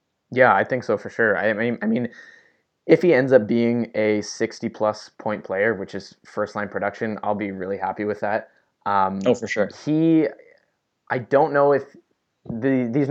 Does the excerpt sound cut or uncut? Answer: uncut